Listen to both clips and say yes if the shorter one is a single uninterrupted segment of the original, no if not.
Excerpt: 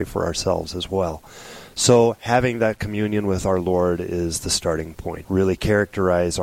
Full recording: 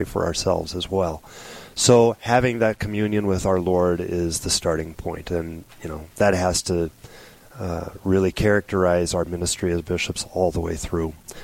no